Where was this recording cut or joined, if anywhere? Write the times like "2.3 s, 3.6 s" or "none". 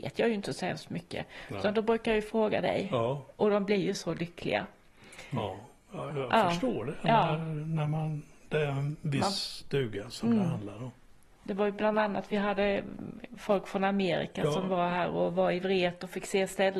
6.1 s